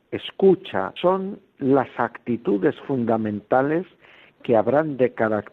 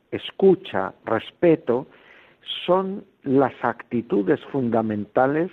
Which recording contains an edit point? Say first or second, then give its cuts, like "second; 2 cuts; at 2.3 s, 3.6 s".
first; 1 cut; at 1.0 s